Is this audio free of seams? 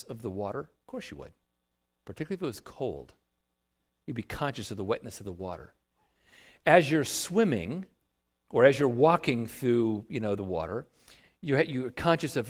yes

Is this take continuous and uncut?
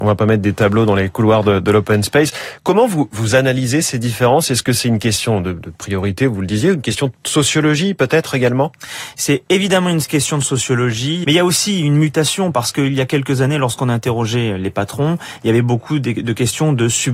no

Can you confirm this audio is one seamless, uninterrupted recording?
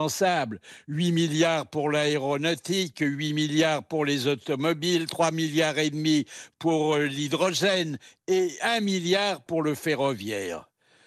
yes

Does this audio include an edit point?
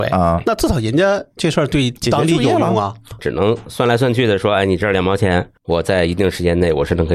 yes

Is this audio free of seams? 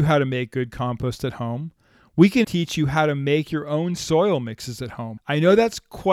no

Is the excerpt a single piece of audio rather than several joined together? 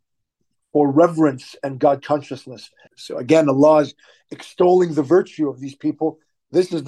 no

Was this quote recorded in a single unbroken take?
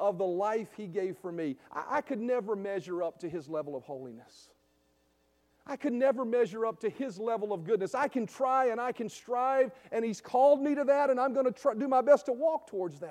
yes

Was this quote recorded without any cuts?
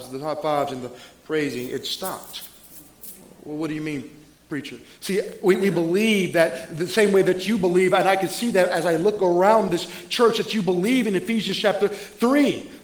yes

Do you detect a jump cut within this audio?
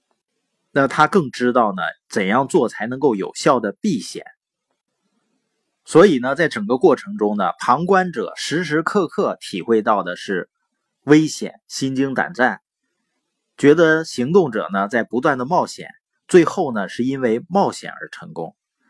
no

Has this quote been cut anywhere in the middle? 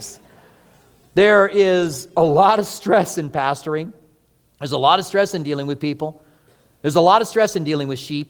no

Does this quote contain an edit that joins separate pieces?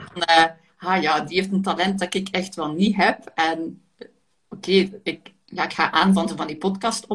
no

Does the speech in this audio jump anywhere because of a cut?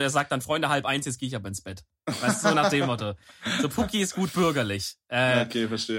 no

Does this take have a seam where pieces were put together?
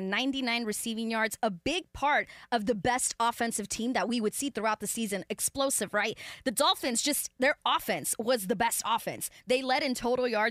no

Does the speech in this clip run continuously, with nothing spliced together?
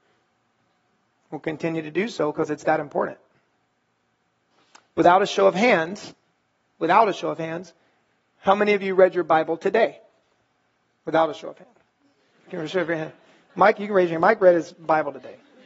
yes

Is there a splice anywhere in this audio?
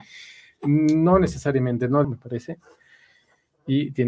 yes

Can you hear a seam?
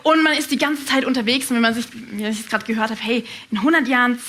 no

